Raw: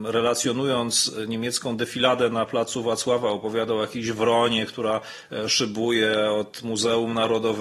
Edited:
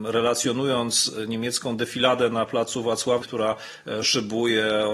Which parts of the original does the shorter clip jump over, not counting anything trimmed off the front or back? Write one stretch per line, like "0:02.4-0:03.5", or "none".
0:03.2-0:04.7